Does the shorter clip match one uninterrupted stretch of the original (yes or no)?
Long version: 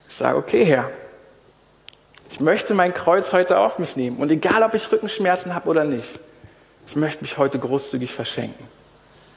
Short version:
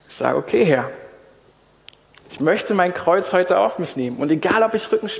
yes